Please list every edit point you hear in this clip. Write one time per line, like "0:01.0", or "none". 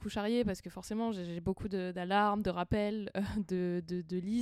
none